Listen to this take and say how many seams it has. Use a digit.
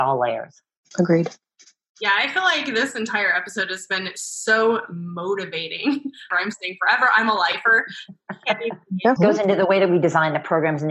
2